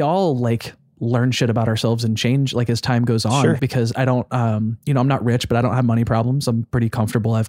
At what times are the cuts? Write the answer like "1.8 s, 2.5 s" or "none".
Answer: 3.6 s

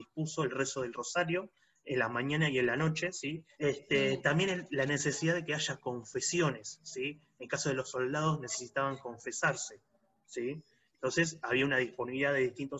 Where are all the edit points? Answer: 3.6 s

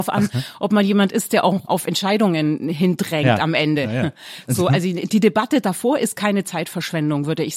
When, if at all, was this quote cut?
1.7 s

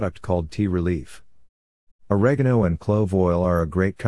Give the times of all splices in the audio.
1.9 s

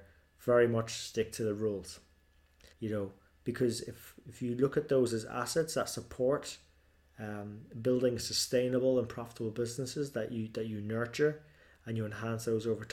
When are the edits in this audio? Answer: 2.7 s

